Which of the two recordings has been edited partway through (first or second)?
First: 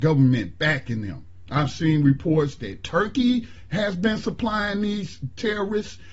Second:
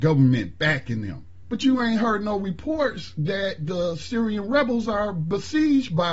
second